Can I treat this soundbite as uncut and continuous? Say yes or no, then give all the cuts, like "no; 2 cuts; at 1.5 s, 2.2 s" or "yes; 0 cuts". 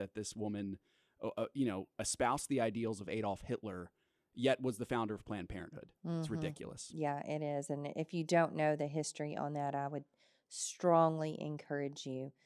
yes; 0 cuts